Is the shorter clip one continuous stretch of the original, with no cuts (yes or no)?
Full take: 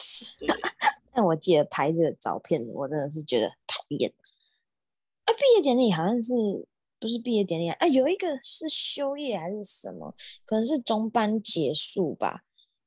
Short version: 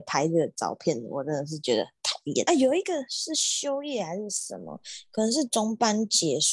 no